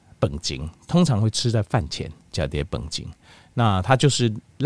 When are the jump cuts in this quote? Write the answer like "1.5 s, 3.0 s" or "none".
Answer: none